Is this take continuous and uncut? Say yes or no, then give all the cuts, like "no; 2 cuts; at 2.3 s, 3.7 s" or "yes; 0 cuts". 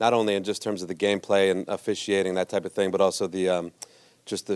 yes; 0 cuts